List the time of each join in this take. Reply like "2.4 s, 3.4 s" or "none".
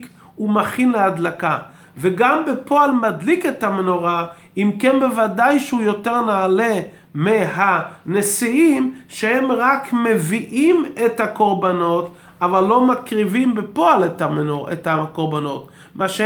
none